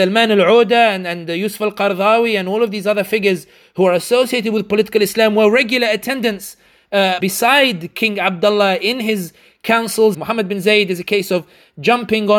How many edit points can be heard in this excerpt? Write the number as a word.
two